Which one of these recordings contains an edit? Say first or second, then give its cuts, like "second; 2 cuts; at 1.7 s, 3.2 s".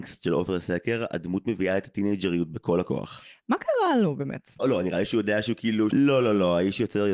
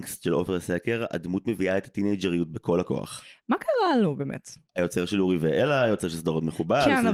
first; 2 cuts; at 4.6 s, 5.9 s